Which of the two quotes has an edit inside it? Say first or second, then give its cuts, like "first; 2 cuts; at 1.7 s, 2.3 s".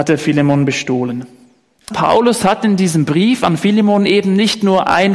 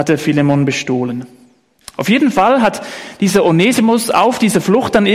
first; 1 cut; at 1.9 s